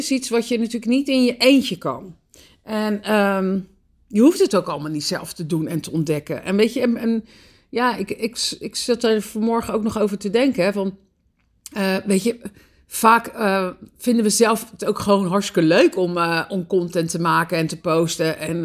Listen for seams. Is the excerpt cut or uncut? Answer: uncut